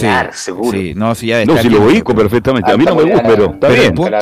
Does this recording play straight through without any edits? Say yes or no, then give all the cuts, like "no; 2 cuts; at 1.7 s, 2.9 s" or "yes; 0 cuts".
no; 1 cut; at 3.2 s